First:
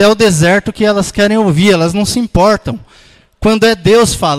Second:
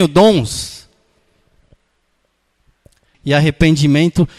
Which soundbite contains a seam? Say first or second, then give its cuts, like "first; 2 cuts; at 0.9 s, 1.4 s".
second; 1 cut; at 3.1 s